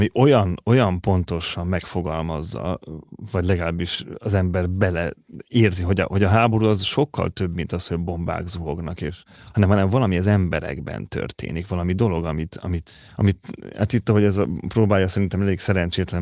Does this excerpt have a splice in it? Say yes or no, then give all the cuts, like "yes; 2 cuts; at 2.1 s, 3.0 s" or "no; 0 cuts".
no; 0 cuts